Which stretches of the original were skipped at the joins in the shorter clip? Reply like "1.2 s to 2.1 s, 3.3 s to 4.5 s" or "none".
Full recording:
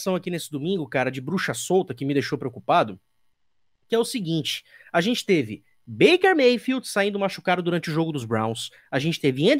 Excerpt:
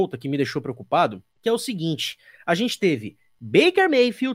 3.1 s to 3.8 s